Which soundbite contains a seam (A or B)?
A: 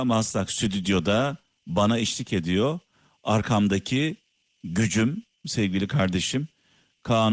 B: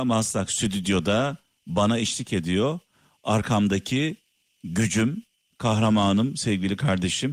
A